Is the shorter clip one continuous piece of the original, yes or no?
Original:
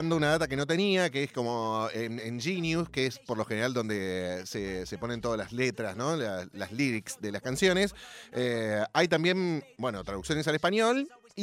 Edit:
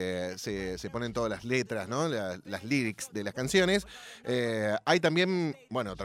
yes